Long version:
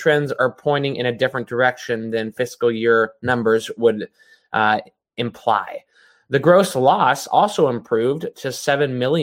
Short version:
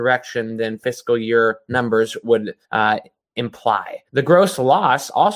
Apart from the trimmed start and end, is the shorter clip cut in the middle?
yes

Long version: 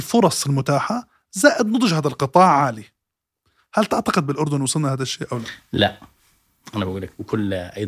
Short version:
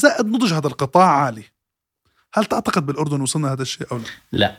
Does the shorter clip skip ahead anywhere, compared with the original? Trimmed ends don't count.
no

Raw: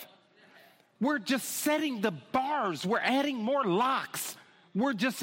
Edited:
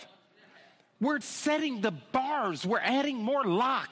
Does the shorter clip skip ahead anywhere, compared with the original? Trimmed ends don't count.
yes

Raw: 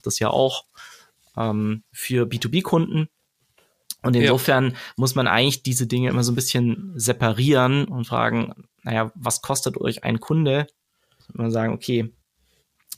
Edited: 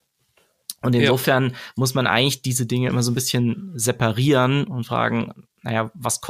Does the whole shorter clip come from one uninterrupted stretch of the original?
yes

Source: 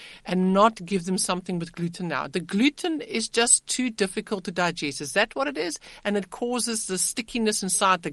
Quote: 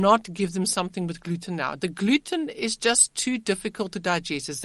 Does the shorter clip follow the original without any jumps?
yes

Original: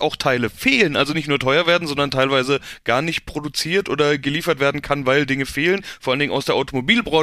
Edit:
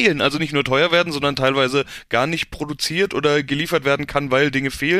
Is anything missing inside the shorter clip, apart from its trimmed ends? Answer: no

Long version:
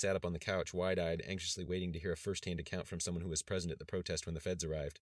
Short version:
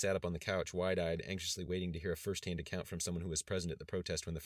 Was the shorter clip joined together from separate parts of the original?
no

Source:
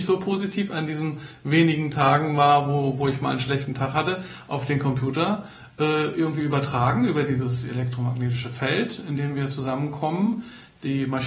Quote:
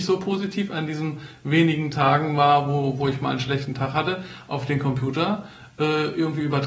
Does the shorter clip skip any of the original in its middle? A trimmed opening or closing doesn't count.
no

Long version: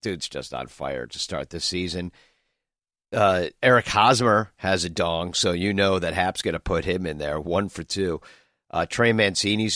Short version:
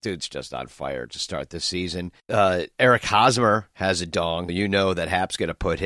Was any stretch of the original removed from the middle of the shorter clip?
yes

